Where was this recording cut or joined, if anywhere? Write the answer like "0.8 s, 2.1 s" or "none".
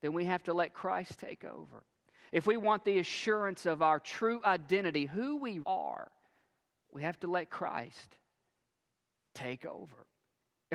5.6 s

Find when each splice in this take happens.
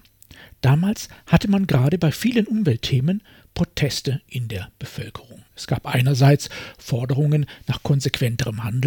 5.5 s

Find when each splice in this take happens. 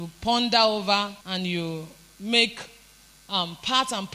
1.2 s

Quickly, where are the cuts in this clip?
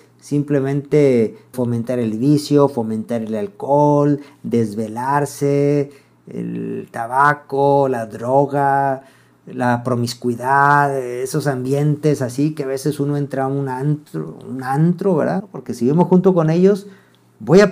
1.5 s, 15.4 s

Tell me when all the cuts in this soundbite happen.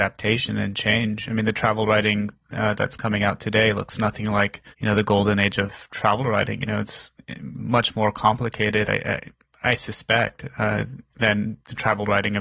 4.7 s

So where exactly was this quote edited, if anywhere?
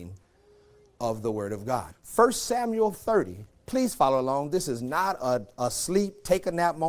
1.9 s

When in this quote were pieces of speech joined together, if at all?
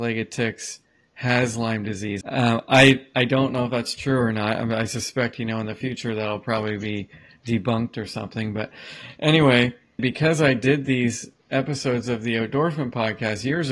2.2 s, 10.0 s

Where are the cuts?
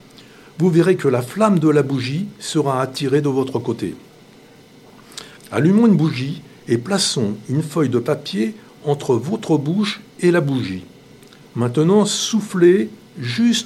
5.4 s

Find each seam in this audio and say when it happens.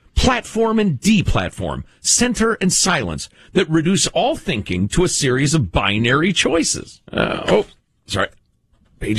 7.1 s

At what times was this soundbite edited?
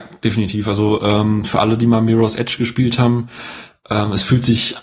none

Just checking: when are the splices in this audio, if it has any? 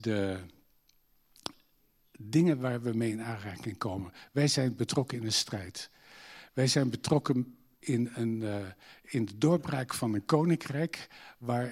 none

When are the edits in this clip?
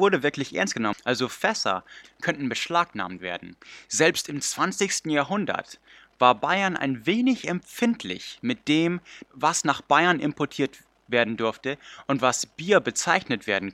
2.0 s

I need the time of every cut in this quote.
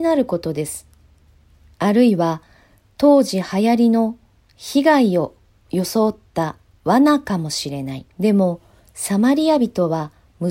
1.7 s, 8.1 s

